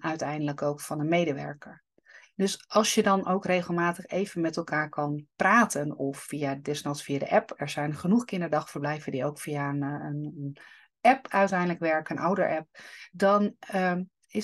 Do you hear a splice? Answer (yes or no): no